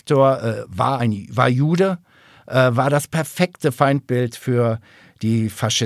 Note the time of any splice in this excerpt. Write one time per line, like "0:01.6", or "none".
none